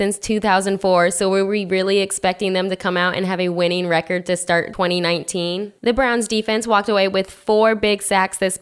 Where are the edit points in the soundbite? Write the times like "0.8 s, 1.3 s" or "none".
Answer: none